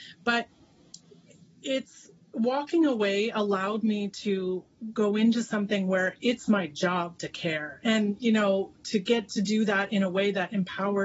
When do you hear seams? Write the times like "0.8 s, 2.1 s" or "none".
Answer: none